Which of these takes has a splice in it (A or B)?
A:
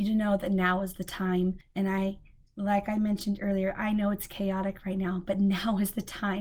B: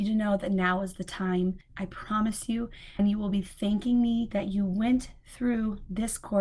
B